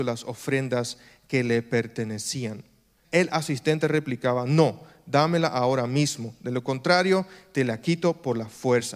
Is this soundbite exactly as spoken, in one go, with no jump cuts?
no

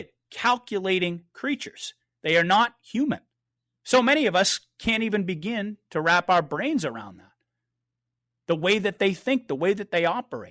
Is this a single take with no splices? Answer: yes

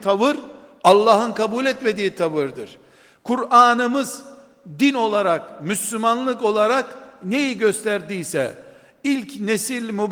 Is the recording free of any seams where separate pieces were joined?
yes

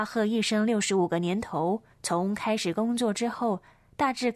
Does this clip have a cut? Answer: yes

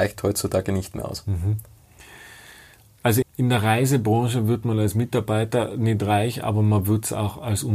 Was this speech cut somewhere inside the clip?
yes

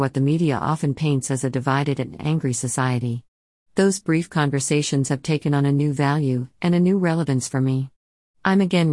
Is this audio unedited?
yes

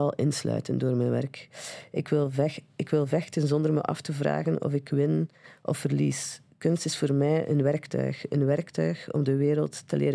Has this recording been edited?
no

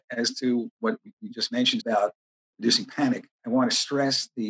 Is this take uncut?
no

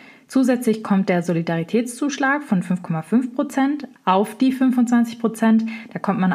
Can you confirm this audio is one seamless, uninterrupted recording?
yes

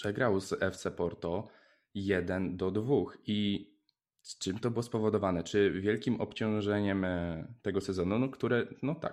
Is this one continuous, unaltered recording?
yes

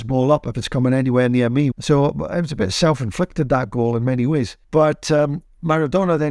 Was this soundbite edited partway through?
yes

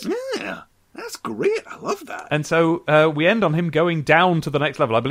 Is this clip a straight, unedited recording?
yes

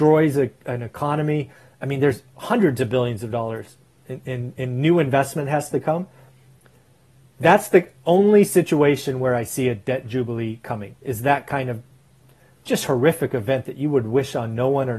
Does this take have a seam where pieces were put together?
no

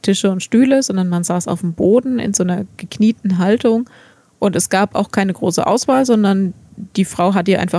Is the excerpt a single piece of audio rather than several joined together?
yes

